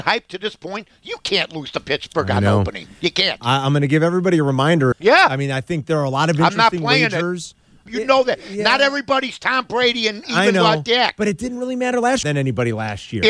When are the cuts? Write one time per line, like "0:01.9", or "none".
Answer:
0:04.9
0:07.9
0:12.2